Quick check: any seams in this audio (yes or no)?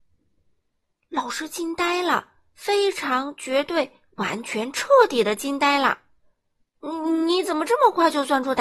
no